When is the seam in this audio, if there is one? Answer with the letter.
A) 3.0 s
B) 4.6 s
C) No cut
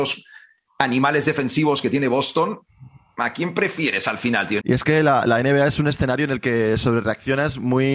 B